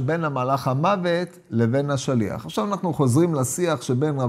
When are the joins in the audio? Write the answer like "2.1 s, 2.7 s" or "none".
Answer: none